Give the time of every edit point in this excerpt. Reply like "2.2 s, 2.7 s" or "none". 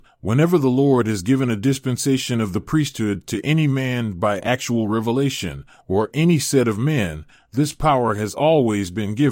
none